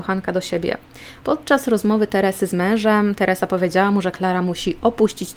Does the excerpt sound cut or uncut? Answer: cut